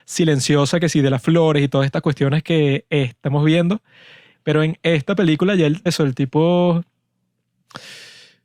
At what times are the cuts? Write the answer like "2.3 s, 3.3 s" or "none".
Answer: 4.3 s, 5.9 s